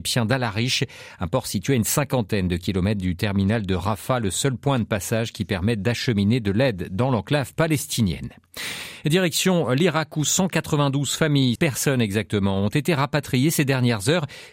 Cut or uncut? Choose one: cut